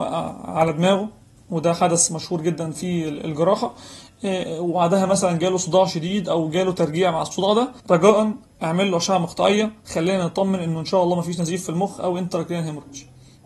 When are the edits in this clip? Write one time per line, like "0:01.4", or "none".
0:07.8